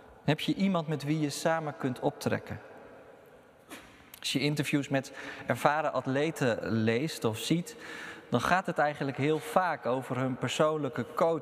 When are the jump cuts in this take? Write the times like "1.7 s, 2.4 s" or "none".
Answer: none